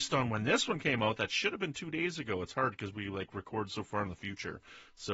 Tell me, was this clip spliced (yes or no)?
no